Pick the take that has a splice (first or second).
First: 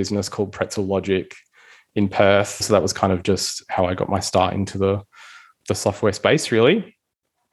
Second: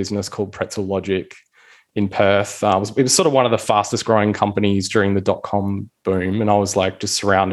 first